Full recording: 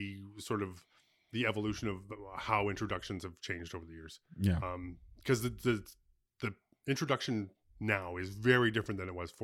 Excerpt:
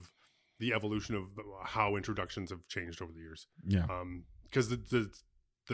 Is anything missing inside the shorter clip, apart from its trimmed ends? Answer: no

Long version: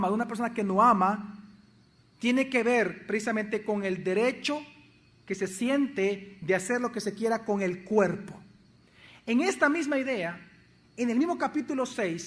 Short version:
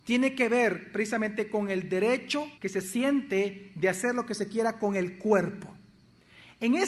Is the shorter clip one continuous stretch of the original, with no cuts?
no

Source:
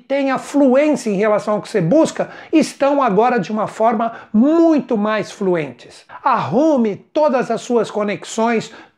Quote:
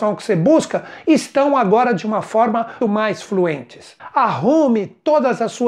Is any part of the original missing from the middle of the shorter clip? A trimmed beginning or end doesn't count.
yes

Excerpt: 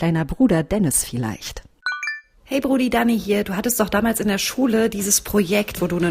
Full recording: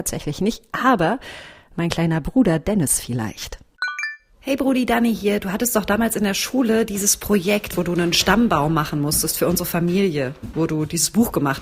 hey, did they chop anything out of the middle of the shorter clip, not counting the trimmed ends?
no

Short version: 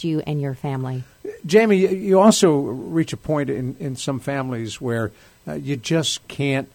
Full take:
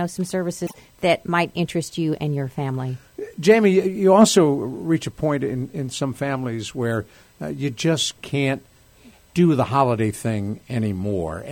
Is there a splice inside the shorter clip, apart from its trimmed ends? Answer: no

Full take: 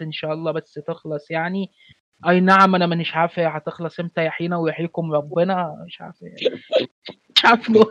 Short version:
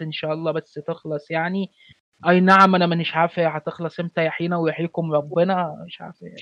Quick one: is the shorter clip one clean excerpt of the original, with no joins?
yes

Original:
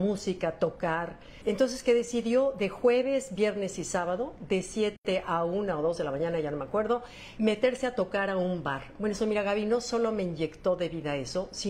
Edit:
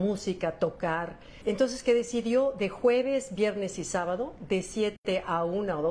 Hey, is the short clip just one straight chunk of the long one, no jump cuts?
yes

